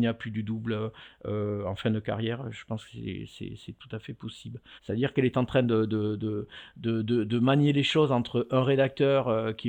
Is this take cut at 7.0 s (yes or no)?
no